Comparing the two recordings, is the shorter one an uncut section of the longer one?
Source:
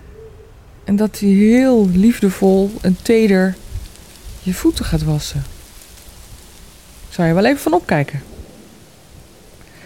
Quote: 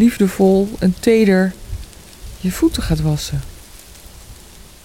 yes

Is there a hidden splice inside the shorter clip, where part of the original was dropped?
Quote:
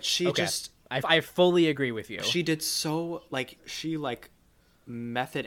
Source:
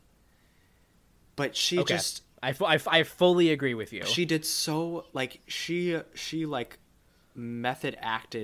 yes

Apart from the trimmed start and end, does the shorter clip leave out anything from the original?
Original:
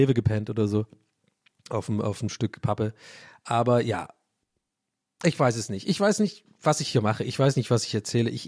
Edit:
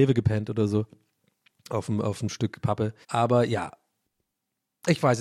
yes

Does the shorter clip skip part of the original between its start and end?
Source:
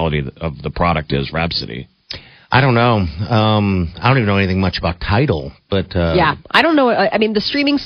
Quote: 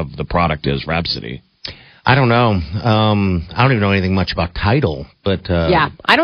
no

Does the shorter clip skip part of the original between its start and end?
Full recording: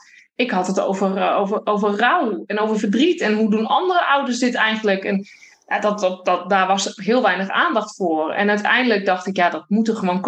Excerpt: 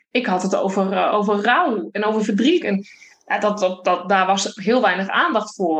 yes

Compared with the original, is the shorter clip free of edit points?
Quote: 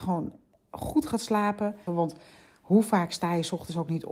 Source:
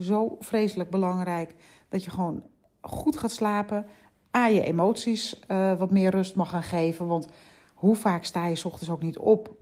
no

